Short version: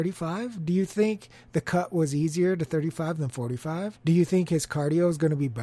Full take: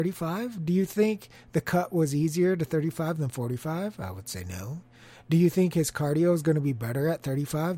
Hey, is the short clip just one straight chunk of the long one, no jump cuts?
no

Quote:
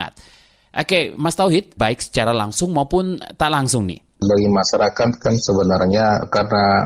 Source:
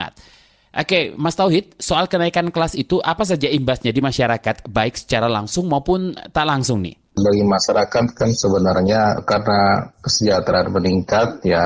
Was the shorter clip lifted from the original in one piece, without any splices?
no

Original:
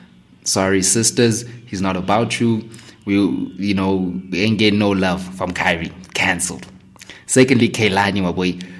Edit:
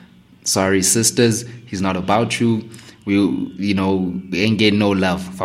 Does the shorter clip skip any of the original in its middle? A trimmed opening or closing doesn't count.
no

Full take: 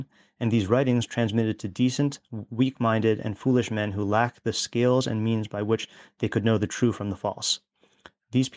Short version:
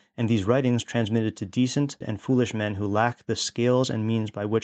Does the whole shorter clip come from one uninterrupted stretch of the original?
no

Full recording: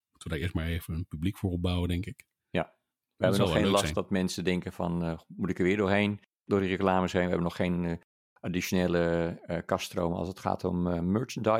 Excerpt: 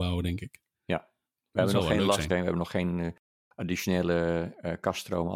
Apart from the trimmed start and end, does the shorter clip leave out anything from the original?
yes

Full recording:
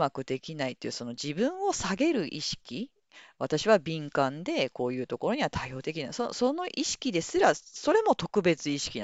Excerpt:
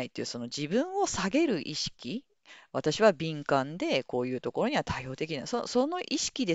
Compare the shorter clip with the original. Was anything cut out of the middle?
no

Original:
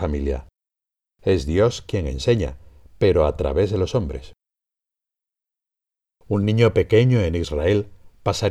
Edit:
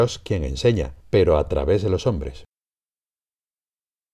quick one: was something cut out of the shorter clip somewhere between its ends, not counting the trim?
yes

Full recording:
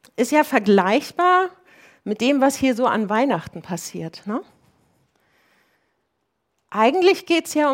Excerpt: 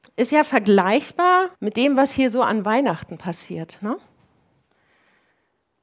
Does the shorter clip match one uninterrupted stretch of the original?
no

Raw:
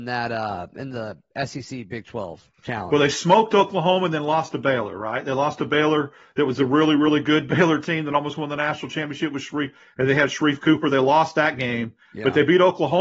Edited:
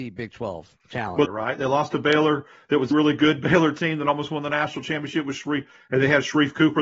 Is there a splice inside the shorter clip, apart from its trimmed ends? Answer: yes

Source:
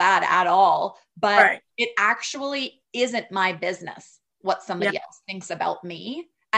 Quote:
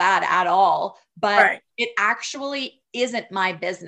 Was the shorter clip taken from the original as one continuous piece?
yes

